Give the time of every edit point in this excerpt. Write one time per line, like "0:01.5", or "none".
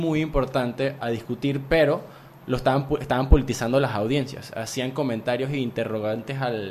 0:01.0